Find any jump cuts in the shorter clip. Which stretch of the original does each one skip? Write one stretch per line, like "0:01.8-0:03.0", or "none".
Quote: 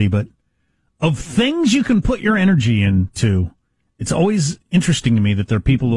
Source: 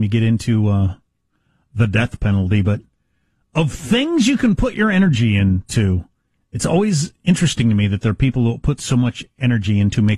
none